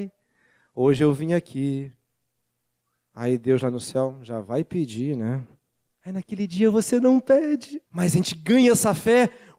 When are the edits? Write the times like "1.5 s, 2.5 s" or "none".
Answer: 5.9 s, 7.9 s